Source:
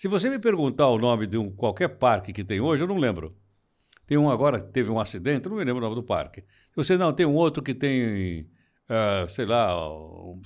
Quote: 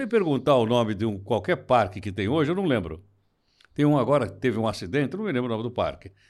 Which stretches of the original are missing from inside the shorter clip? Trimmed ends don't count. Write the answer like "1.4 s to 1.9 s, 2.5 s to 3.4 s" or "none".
none